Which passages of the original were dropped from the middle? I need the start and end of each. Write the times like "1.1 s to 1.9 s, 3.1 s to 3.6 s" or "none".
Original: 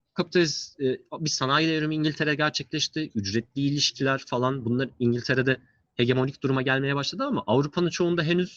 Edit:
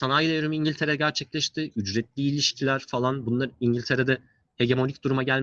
none